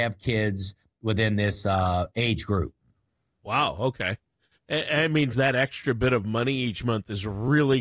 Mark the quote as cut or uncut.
cut